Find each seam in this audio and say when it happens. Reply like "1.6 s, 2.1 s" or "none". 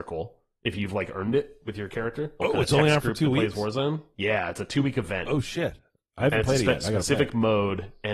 2.4 s